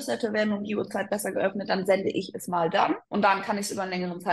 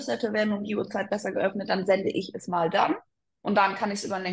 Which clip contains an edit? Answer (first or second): first